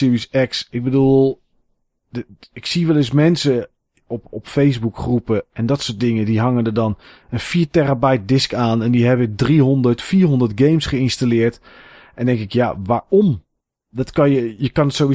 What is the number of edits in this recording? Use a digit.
0